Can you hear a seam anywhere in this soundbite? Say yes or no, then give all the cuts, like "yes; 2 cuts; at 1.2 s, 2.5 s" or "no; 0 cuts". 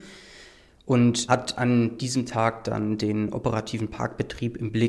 yes; 1 cut; at 1.3 s